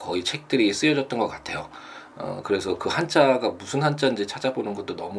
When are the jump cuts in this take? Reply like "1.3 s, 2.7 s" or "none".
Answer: none